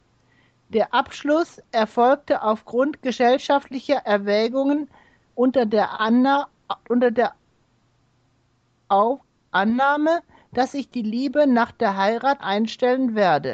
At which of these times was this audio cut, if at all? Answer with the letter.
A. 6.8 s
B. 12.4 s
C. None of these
B